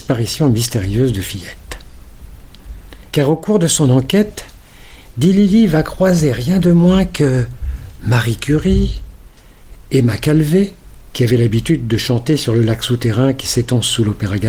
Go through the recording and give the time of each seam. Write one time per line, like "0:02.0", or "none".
0:03.1
0:11.1